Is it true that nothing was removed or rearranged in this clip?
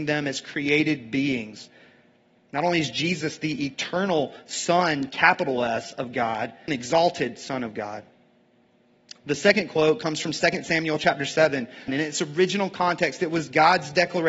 no; 2 cuts; at 6.7 s, 11.9 s

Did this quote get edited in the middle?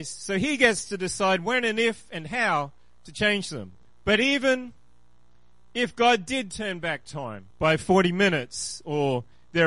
yes; 2 cuts; at 3.8 s, 7.5 s

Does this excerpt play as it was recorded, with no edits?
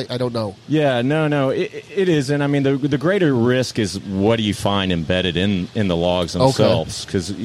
yes; 0 cuts

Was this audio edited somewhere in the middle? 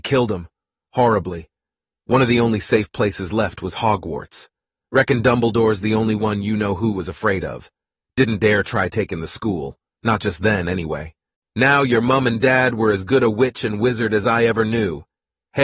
no; 0 cuts

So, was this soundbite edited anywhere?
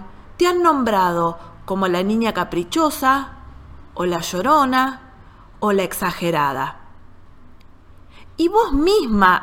no; 0 cuts

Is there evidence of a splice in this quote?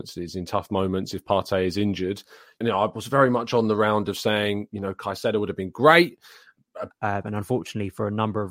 yes; 2 cuts; at 2.6 s, 6.9 s

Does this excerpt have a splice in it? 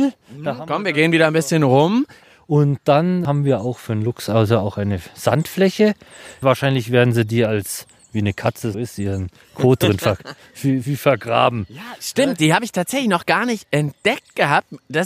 yes; 1 cut; at 8.7 s

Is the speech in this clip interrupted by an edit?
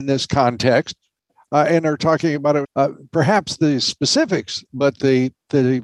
yes; 2 cuts; at 2.6 s, 4.6 s

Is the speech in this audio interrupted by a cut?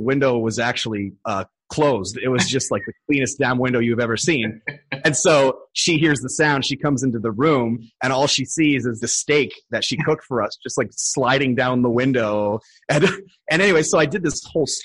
yes; 1 cut; at 9.0 s

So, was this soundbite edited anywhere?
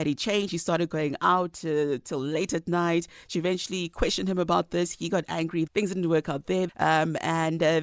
yes; 2 cuts; at 5.7 s, 6.7 s

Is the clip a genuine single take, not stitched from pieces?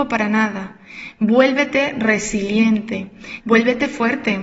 no; 1 cut; at 3.4 s

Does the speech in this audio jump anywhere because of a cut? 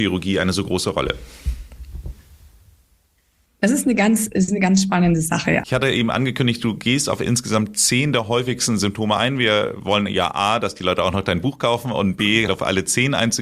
yes; 2 cuts; at 5.6 s, 12.5 s

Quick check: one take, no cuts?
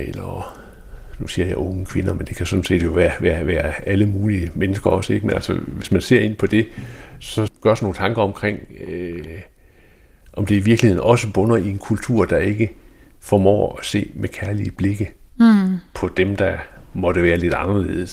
no; 1 cut; at 7.5 s

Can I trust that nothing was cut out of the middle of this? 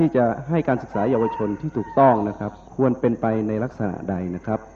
no; 1 cut; at 2.7 s

